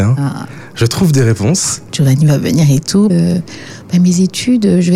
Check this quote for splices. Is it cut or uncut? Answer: cut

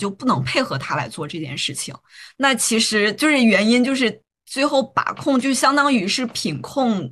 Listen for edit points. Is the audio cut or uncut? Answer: cut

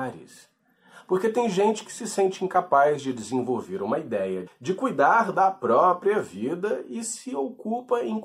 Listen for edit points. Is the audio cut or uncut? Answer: cut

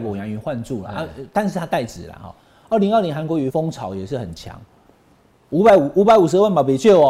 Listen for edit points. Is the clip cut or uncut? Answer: cut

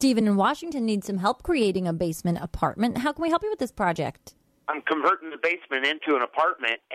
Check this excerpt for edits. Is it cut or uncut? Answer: uncut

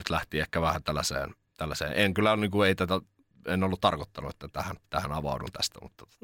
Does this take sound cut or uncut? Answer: uncut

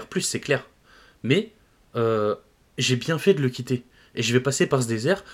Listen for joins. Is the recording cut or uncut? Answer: uncut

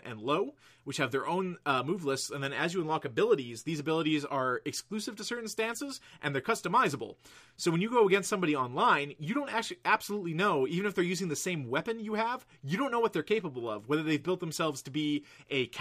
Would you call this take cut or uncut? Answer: uncut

